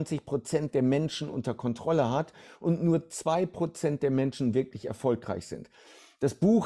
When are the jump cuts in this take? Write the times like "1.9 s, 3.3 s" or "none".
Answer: none

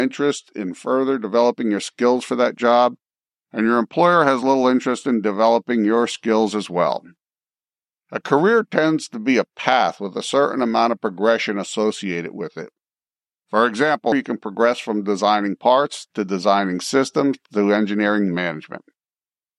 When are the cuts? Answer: 14.1 s

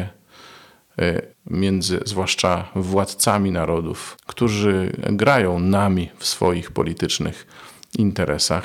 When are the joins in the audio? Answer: 1.3 s

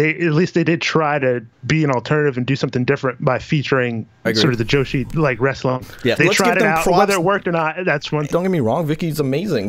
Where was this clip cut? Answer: 6.2 s, 8.3 s

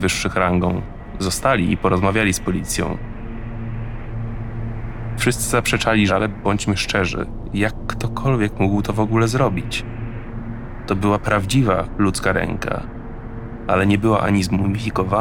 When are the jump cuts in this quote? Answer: 6.1 s

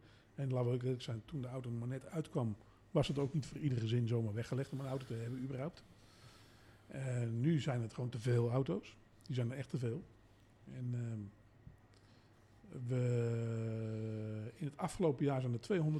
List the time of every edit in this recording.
none

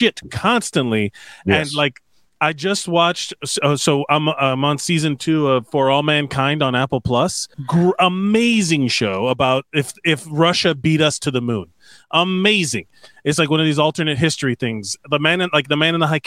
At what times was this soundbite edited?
7.5 s

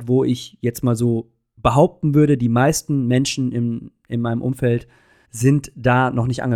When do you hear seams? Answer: 5.2 s

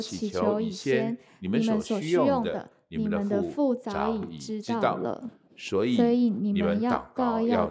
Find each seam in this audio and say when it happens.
none

